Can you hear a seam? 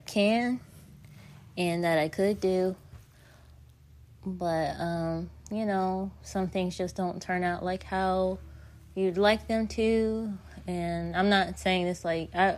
no; 0 cuts

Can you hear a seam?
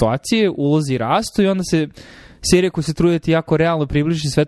no; 0 cuts

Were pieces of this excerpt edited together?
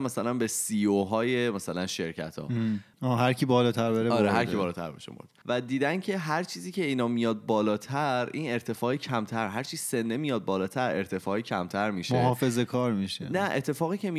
yes; 2 cuts; at 2.9 s, 5.4 s

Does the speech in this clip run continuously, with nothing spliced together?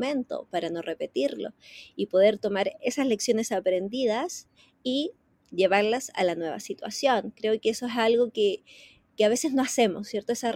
yes; 0 cuts

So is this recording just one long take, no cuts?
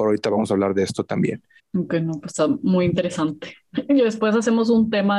no; 1 cut; at 1.6 s

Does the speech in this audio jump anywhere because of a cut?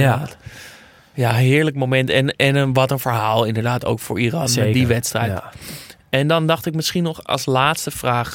no; 0 cuts

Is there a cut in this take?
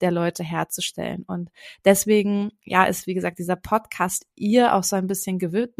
no; 0 cuts

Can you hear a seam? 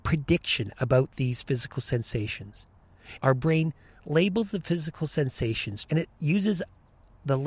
yes; 2 cuts; at 3.2 s, 5.8 s

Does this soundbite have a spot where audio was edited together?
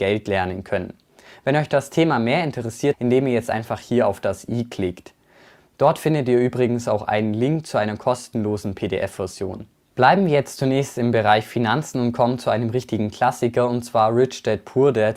yes; 1 cut; at 2.9 s

